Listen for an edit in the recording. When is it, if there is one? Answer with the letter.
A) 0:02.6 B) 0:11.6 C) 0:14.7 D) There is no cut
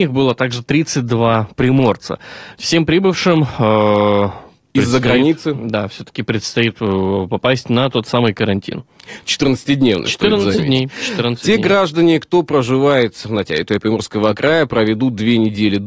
D